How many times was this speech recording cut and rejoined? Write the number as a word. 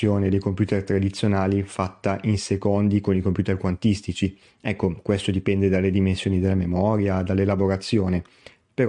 zero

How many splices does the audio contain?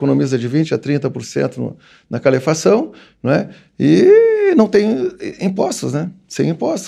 zero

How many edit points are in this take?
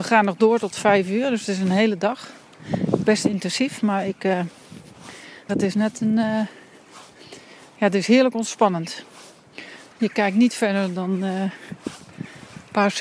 two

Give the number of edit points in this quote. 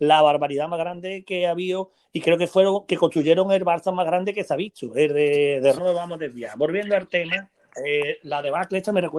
one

